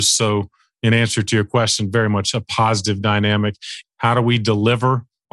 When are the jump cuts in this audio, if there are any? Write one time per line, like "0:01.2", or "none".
0:03.8